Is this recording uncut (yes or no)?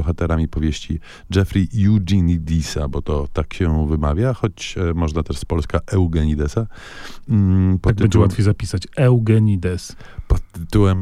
yes